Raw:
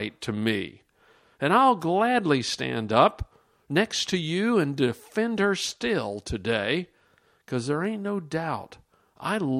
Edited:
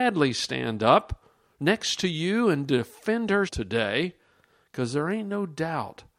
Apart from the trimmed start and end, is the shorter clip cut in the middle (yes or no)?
yes